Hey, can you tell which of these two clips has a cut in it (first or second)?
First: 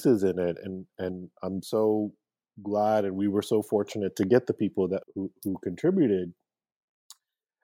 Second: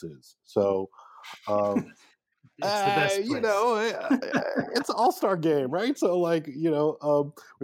first